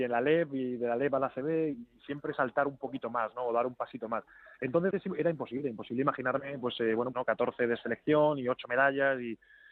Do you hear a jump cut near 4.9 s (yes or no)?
yes